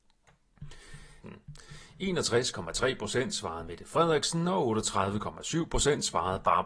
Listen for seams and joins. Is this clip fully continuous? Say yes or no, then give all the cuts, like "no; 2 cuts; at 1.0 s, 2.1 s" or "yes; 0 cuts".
no; 1 cut; at 1.2 s